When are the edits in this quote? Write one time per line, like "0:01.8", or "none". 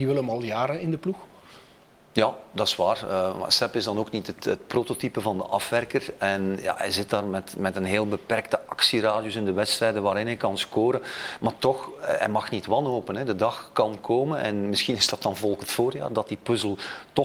none